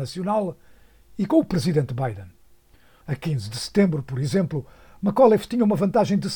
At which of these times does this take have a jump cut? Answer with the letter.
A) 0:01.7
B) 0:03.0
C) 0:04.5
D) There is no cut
B